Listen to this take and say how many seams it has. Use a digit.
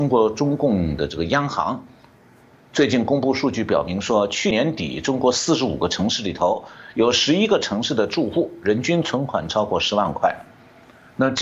1